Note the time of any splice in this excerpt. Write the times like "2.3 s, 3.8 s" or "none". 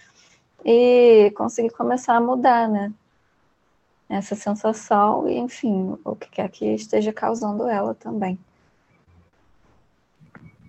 none

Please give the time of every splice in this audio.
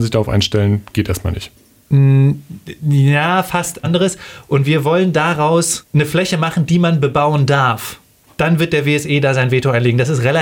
3.8 s

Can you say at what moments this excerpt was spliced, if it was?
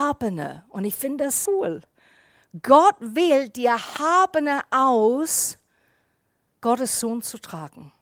1.5 s

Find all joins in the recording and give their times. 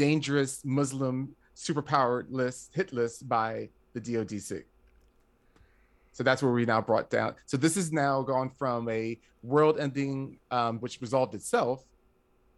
10.8 s

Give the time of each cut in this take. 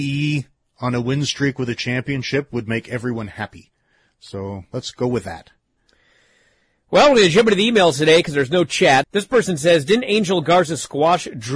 9.0 s

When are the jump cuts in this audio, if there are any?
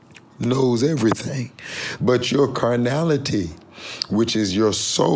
2.0 s

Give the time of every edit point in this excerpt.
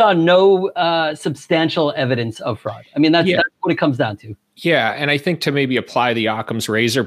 none

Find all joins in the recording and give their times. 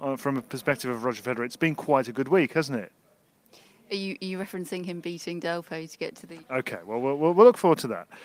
6.4 s

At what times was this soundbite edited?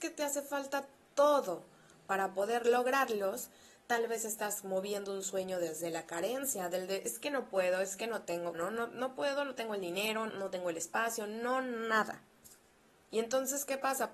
8.5 s, 10.3 s

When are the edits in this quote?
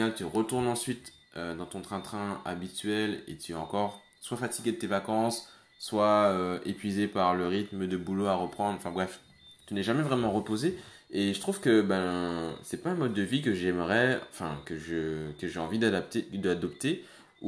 none

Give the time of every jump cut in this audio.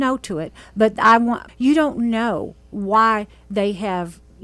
1.5 s

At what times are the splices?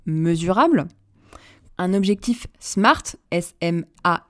1.7 s, 3.2 s

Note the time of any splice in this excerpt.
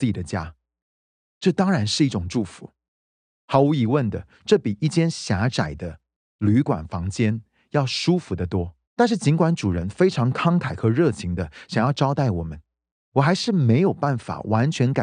8.8 s

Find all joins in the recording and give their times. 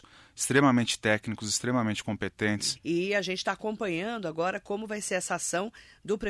2.8 s

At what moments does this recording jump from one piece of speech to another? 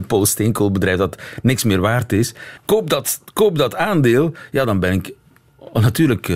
2.6 s

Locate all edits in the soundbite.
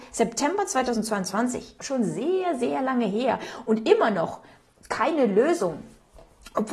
1.8 s

